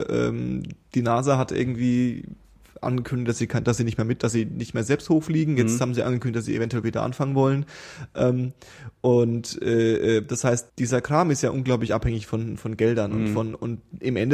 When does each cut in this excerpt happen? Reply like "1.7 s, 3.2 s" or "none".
10.7 s, 12.6 s